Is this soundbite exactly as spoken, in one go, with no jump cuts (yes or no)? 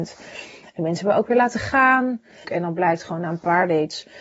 no